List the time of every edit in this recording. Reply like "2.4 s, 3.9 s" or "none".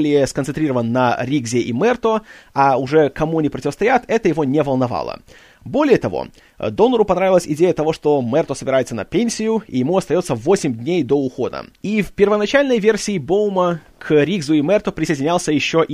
11.8 s